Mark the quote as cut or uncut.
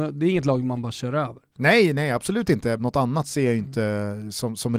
cut